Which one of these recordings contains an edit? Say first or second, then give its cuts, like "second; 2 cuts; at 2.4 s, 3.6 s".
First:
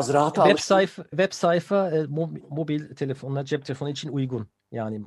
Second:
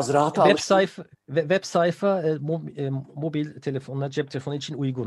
first; 2 cuts; at 1.1 s, 2.4 s